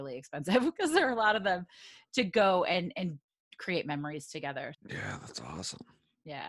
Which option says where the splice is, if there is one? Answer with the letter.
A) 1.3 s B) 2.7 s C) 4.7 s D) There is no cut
C